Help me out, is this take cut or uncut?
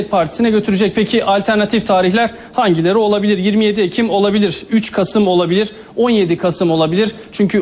uncut